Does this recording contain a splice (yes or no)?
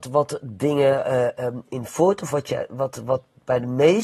yes